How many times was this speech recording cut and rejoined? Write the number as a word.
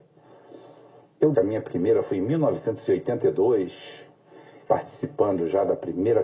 two